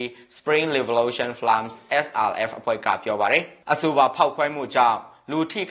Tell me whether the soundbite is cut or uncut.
cut